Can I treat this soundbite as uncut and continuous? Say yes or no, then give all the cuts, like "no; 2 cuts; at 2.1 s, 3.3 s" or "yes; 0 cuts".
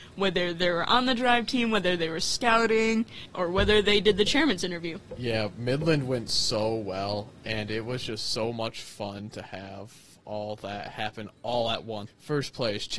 no; 1 cut; at 12.1 s